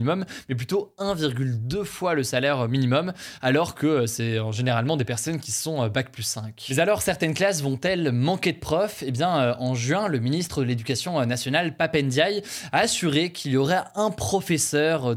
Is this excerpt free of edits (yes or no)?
yes